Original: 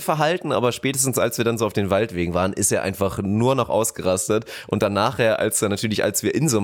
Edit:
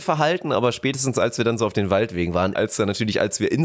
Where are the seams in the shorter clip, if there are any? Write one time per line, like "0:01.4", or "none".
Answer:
0:02.5